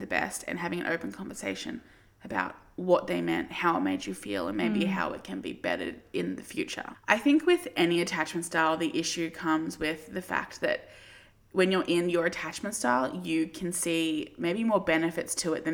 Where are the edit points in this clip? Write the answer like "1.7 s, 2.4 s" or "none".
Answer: 6.9 s

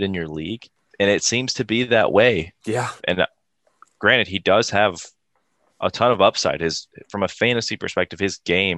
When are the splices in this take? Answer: 3.0 s

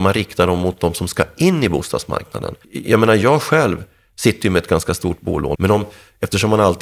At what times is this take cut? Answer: 2.6 s, 5.5 s

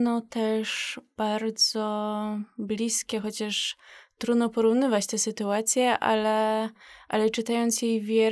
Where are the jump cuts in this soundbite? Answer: none

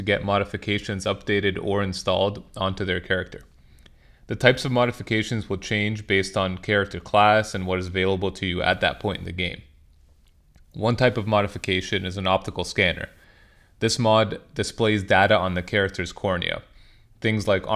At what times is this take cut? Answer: none

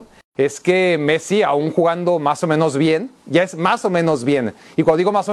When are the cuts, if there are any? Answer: none

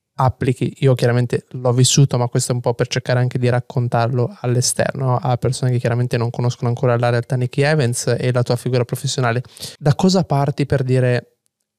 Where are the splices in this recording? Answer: 9.8 s

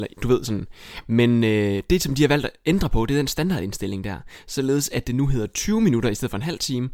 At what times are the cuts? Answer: none

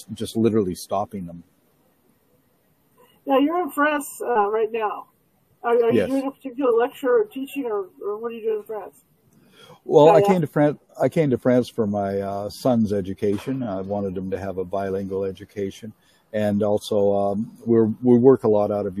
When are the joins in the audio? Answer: none

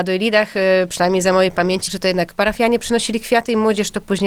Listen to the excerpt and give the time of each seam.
1.9 s

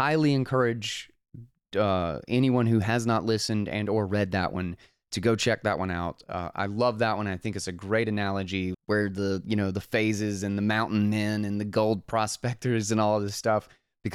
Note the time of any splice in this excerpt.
8.7 s

